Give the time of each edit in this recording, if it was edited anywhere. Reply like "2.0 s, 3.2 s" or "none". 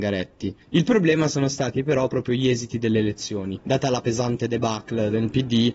none